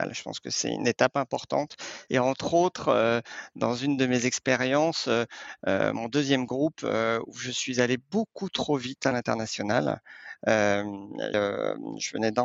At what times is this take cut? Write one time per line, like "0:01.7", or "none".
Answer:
0:02.1
0:11.3